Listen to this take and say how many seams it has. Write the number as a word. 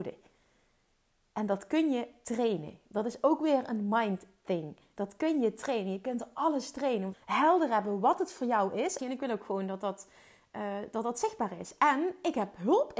two